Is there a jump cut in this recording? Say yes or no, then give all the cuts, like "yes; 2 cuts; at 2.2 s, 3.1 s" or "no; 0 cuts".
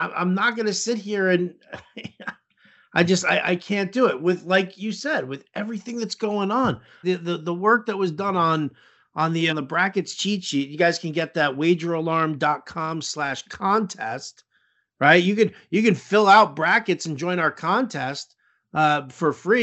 yes; 2 cuts; at 7.0 s, 9.5 s